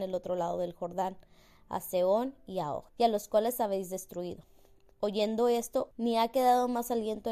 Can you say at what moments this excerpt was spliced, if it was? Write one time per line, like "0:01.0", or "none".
0:02.9
0:05.9